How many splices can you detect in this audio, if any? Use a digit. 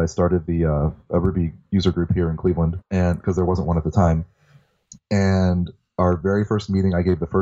1